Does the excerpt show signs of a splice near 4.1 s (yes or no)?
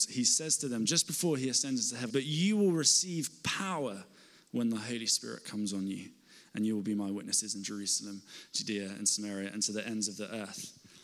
no